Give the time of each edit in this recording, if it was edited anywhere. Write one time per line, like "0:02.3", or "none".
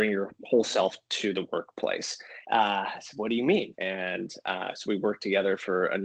0:02.4
0:03.7